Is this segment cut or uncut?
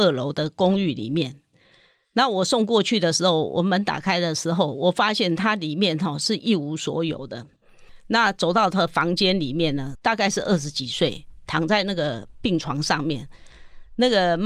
cut